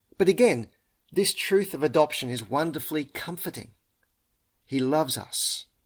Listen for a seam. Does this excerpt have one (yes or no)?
yes